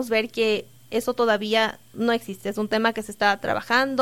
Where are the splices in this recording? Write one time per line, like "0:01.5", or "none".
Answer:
none